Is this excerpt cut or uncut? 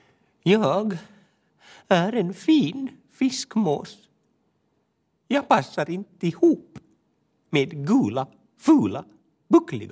uncut